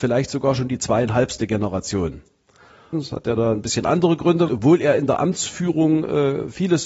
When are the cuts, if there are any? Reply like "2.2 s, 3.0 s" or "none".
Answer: 2.9 s, 4.5 s